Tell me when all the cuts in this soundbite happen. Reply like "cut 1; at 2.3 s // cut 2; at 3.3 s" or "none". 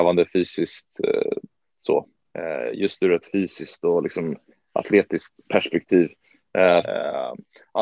cut 1; at 2.3 s // cut 2; at 6.8 s